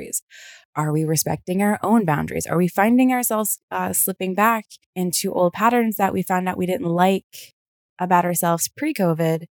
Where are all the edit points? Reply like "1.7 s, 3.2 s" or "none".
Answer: 4.8 s